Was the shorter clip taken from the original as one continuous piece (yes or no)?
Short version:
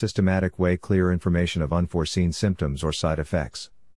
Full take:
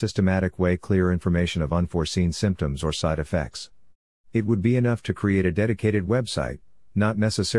yes